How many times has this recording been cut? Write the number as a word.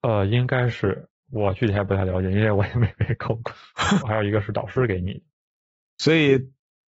one